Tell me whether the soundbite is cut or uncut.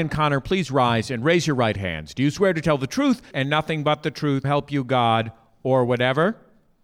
cut